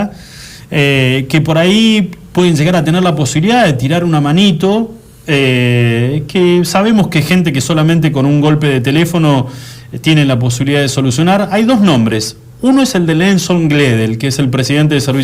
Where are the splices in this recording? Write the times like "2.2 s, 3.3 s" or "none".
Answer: none